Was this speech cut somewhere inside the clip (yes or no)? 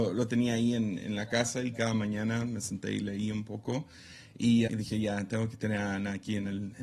yes